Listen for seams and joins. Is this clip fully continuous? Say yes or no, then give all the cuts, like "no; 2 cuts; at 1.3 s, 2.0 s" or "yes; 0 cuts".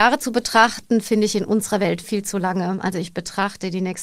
no; 1 cut; at 2.0 s